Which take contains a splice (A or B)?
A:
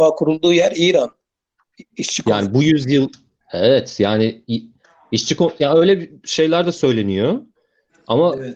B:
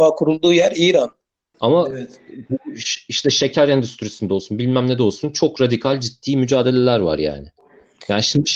B